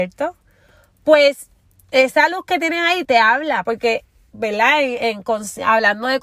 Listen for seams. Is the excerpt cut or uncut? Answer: cut